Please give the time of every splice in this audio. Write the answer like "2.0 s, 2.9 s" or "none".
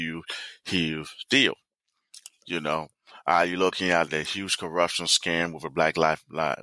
2.2 s, 4.1 s